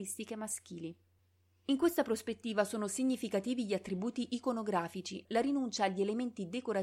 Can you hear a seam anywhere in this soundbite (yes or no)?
yes